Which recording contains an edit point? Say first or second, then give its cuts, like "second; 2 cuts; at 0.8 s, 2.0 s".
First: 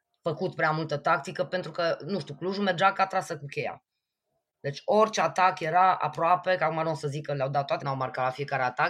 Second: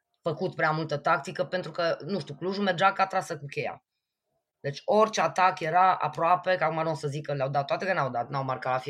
first; 1 cut; at 7.8 s